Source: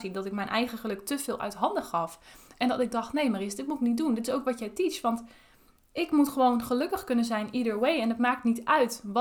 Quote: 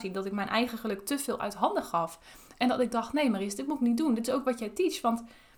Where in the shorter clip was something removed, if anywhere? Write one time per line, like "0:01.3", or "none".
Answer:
none